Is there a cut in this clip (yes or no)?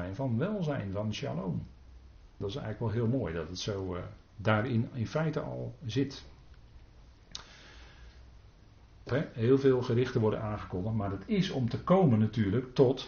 yes